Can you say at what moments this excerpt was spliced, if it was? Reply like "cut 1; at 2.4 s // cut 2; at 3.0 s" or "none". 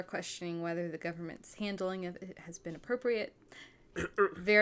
cut 1; at 3.4 s